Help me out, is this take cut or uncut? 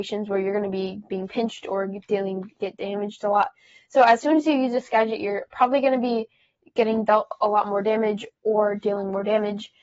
uncut